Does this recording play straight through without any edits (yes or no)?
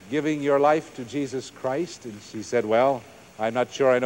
yes